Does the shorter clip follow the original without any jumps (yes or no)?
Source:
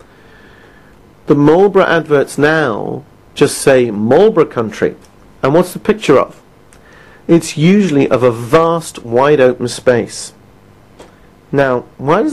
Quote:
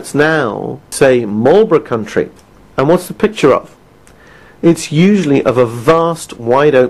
no